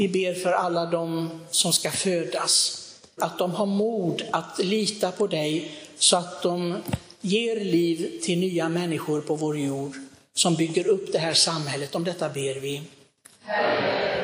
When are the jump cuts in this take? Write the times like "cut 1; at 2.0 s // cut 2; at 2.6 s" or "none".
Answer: cut 1; at 3.2 s